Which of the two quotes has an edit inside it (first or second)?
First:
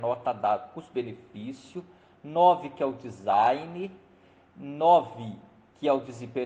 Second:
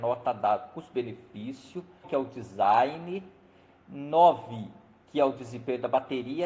second